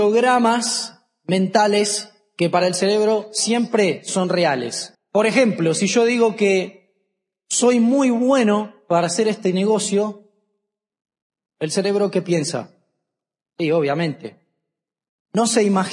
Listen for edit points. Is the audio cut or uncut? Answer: cut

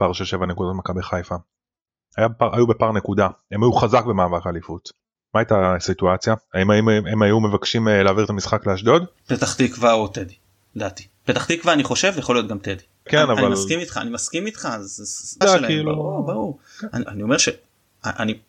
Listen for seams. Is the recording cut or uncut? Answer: cut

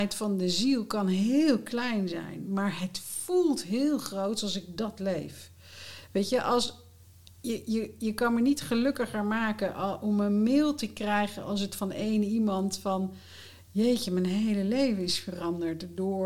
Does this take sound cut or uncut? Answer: uncut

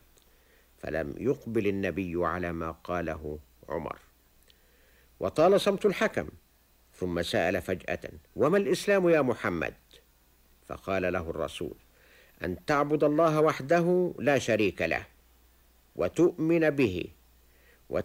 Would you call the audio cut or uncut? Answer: cut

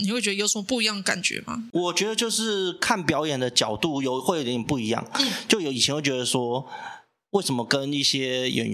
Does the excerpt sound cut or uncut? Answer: uncut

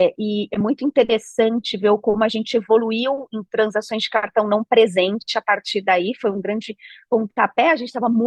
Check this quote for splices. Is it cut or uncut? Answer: uncut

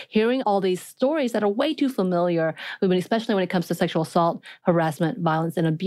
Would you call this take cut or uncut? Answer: uncut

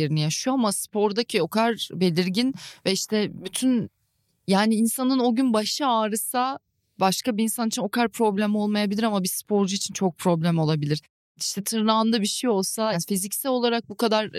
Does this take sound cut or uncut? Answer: cut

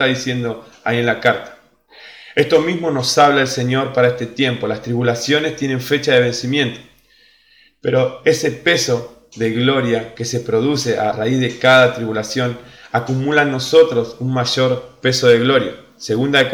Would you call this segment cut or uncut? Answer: cut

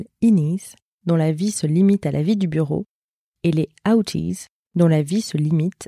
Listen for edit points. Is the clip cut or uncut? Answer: uncut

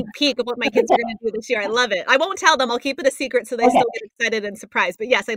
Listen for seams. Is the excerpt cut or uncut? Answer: uncut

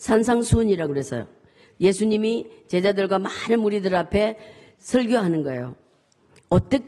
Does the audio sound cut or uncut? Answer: uncut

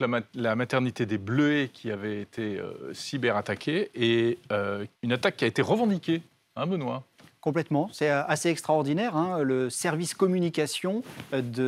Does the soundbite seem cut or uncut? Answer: cut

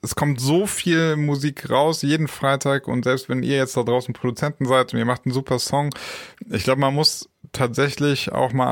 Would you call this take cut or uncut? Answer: uncut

